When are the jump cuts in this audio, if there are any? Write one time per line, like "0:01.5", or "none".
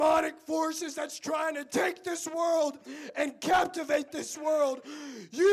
none